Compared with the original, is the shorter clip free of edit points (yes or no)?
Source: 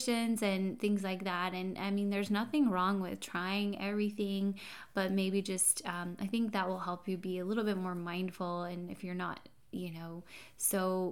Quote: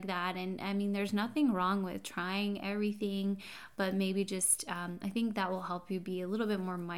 yes